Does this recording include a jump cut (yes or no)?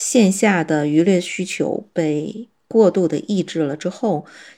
no